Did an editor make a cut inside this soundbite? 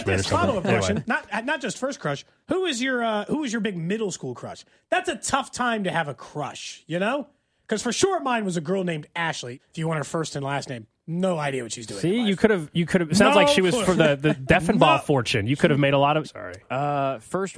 yes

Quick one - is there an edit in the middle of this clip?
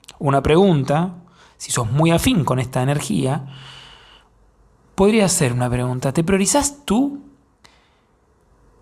no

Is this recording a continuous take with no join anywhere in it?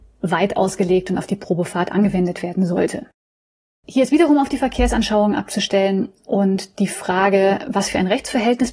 yes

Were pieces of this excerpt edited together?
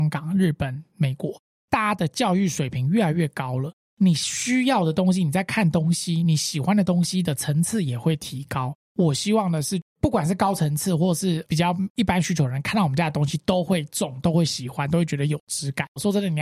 no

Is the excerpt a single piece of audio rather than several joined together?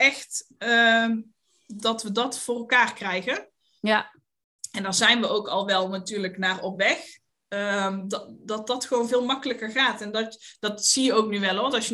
yes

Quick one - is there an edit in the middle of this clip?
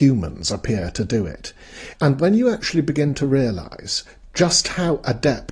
yes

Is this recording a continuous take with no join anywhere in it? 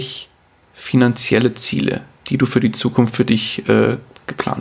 yes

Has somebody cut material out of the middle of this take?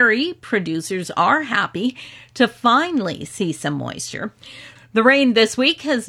yes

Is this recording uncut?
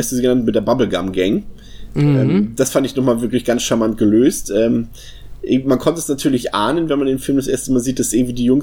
yes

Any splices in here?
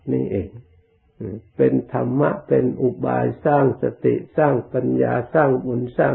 no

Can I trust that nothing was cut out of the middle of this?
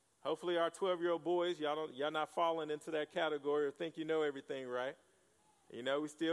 yes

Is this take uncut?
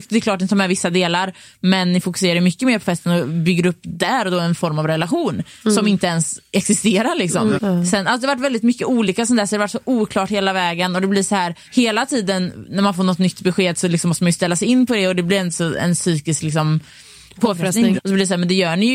no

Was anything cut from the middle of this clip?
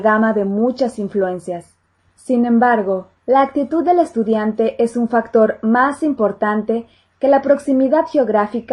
yes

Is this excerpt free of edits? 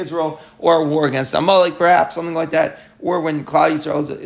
yes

